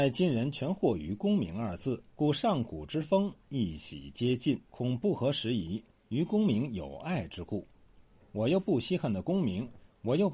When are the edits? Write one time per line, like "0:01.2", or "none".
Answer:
0:02.1
0:04.6